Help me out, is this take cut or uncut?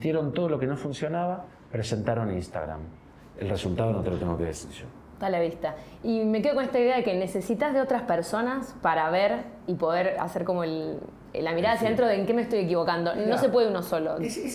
uncut